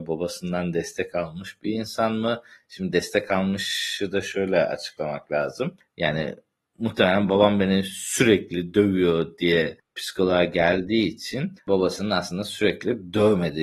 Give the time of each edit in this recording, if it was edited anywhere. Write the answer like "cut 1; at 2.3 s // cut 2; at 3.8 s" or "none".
none